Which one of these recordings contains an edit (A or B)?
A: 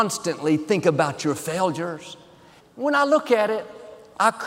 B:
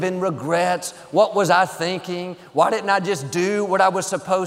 A